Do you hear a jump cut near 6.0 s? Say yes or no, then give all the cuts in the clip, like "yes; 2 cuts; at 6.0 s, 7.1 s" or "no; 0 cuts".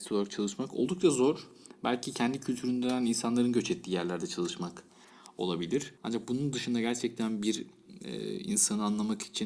yes; 1 cut; at 6.0 s